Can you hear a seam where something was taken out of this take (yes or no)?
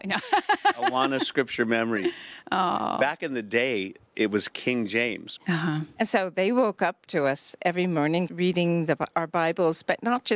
yes